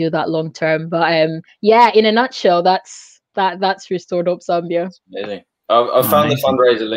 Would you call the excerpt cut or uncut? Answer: uncut